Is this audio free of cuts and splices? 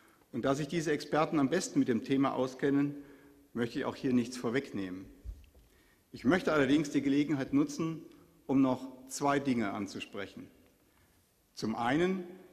yes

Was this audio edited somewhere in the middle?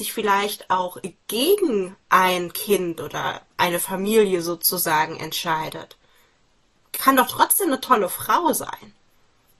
yes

